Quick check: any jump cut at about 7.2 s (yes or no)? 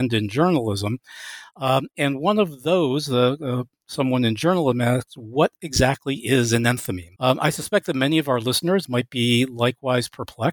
yes